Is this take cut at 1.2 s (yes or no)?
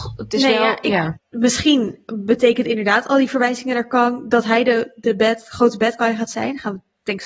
yes